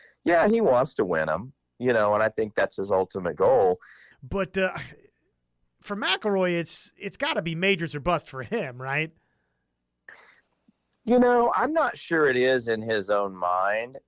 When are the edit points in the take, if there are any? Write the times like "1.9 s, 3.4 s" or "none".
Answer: 4.1 s